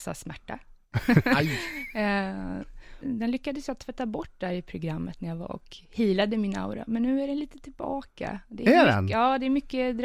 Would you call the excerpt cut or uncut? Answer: cut